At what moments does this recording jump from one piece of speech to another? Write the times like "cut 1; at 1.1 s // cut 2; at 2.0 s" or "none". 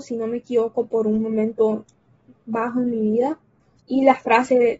cut 1; at 3.8 s

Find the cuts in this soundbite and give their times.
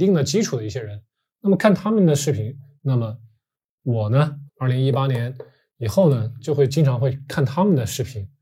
cut 1; at 2.8 s // cut 2; at 4.5 s

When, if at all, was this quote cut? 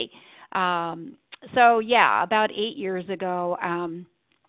none

